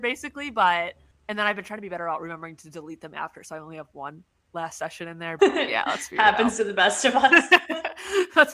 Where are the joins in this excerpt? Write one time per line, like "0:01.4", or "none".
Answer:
0:05.4